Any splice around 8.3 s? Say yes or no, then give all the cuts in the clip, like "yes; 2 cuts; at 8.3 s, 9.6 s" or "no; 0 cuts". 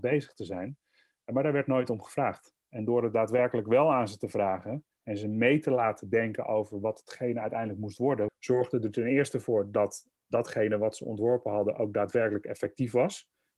yes; 1 cut; at 8.3 s